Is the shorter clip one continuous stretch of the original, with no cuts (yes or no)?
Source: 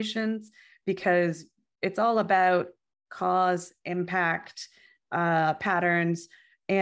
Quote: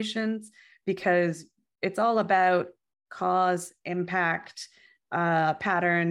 yes